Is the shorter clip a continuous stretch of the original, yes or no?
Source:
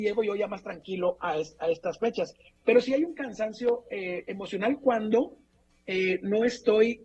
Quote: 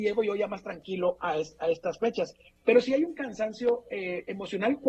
yes